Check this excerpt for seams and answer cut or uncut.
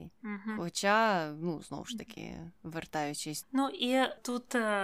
cut